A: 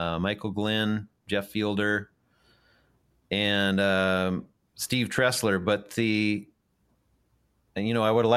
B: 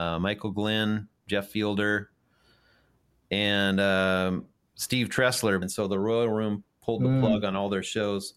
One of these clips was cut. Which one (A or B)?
B